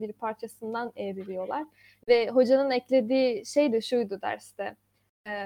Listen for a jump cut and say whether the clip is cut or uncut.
uncut